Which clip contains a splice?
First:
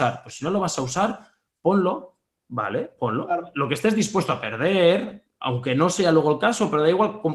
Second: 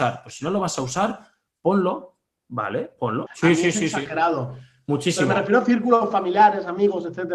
second; 1 cut; at 3.3 s

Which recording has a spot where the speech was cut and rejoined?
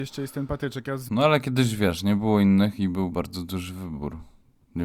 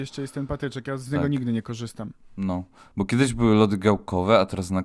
first; 2 cuts; at 1.1 s, 3.1 s

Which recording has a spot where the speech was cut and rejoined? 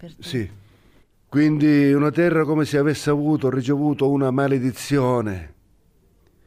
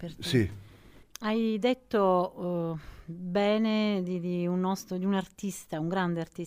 first; 1 cut; at 1.1 s

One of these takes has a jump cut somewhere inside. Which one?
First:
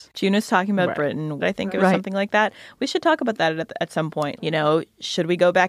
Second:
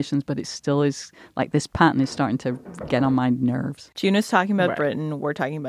first; 2 cuts; at 1.4 s, 4.4 s

